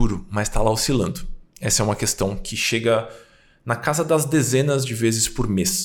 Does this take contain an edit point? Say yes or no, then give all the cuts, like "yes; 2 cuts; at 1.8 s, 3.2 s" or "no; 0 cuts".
no; 0 cuts